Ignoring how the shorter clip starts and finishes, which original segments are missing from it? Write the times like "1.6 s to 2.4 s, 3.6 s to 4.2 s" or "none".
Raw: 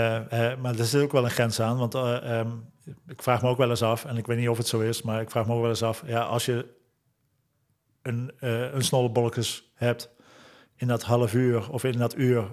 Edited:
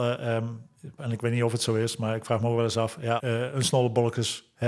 3.0 s to 4.0 s, 6.2 s to 8.4 s